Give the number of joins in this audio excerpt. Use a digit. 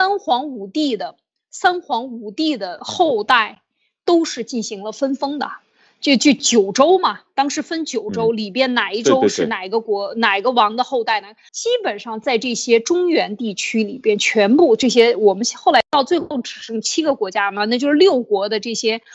1